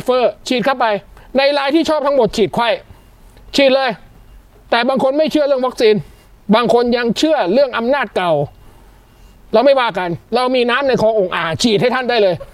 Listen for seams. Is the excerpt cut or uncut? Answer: uncut